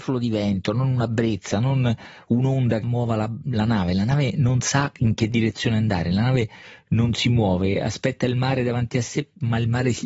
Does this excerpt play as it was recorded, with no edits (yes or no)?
no